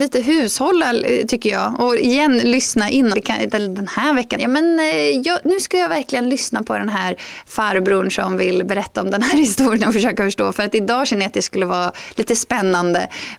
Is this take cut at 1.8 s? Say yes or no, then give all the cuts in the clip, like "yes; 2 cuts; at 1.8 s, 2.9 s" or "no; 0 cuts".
no; 2 cuts; at 3.1 s, 4.4 s